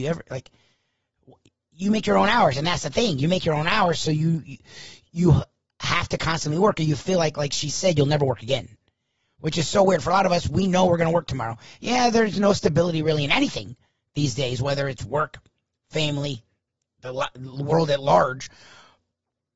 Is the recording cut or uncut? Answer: uncut